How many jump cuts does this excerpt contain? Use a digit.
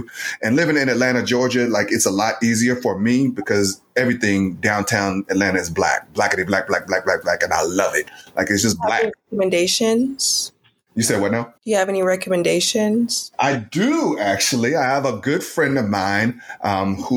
1